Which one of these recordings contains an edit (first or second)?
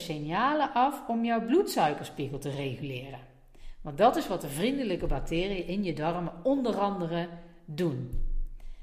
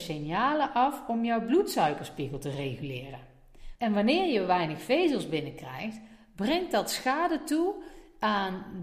second